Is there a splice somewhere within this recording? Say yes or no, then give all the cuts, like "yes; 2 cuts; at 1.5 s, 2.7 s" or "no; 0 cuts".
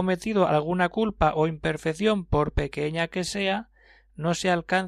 no; 0 cuts